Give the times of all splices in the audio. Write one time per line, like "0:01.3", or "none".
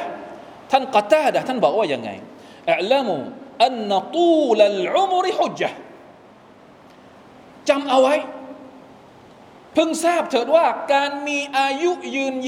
0:05.5